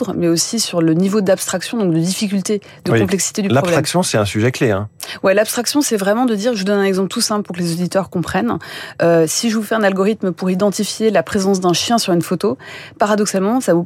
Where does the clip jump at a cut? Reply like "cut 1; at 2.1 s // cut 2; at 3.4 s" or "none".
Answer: none